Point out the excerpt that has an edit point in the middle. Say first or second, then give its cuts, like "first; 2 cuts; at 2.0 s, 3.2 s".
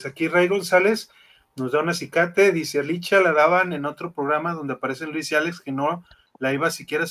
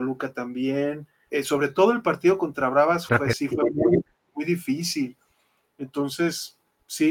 second; 2 cuts; at 1.3 s, 3.1 s